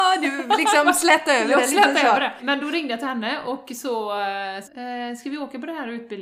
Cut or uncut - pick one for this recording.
cut